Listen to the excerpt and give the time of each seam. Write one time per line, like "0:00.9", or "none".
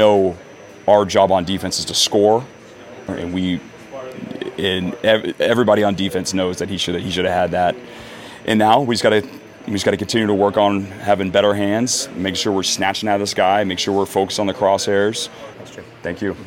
0:03.1
0:15.5